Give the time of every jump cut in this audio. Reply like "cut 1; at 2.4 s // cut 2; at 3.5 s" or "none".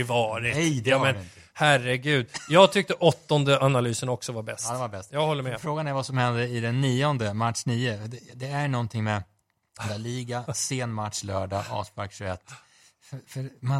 none